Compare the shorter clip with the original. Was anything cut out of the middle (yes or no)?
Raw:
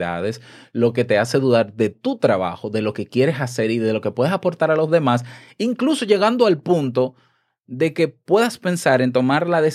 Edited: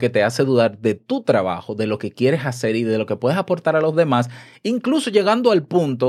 no